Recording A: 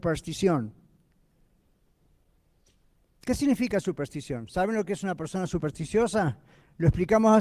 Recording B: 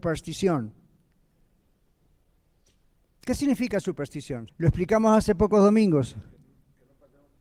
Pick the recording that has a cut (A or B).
B